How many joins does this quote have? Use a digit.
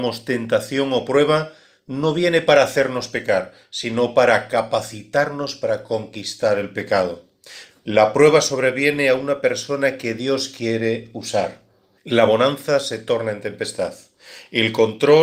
2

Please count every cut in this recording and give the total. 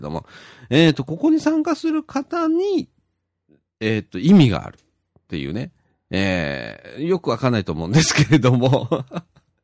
0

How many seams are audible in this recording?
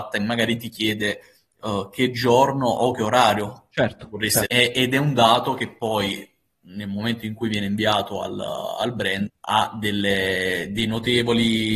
2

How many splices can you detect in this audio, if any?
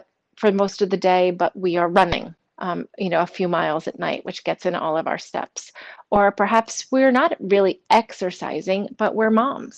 1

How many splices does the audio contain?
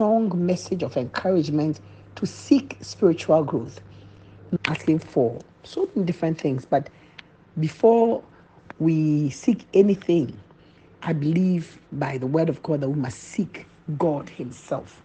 1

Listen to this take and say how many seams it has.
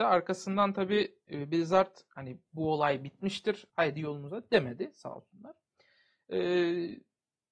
1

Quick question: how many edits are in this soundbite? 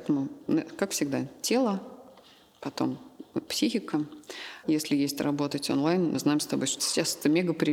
2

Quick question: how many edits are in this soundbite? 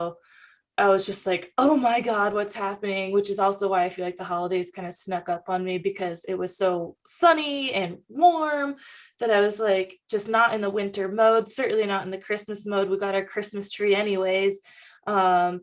0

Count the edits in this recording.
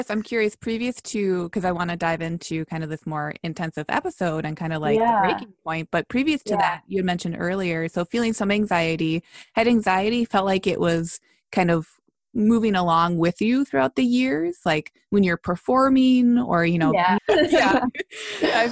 1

